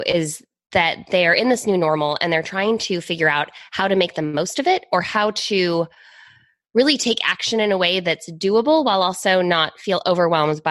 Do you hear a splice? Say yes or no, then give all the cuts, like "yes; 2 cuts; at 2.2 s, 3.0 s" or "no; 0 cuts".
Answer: no; 0 cuts